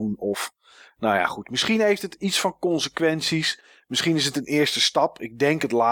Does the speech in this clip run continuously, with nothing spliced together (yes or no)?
yes